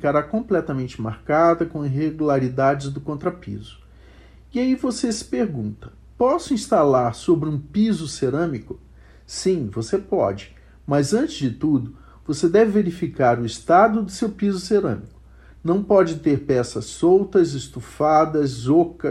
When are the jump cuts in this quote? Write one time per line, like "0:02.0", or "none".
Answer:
none